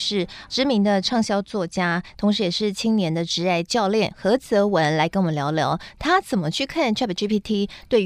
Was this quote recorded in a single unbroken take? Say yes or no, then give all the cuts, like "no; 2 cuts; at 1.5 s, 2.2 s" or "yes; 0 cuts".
yes; 0 cuts